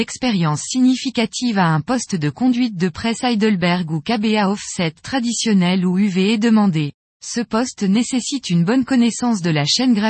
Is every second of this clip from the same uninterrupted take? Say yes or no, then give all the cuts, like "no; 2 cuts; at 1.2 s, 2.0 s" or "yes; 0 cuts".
no; 1 cut; at 7.1 s